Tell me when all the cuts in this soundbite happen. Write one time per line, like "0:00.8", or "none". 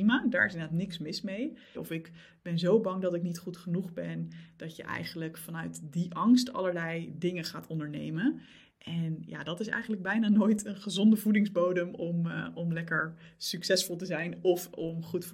0:01.7